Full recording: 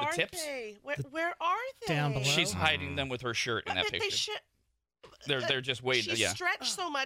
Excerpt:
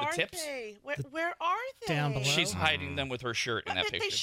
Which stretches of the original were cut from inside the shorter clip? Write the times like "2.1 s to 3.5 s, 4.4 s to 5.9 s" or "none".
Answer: none